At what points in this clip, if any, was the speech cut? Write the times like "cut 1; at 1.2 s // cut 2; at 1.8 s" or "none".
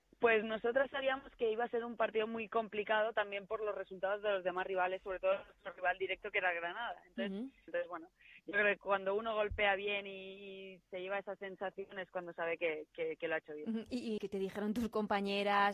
cut 1; at 7.7 s // cut 2; at 14.2 s